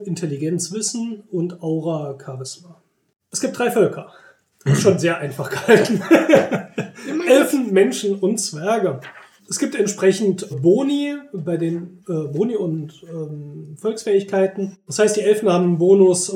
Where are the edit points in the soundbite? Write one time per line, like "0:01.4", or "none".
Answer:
0:10.5